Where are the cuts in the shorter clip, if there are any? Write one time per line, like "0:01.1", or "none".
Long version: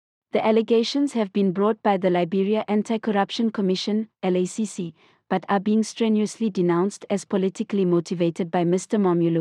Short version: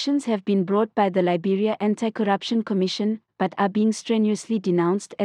0:03.3